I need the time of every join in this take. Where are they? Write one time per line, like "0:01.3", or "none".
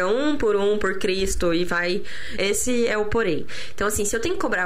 0:02.4